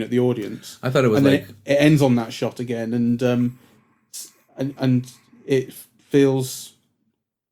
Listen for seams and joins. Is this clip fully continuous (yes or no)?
yes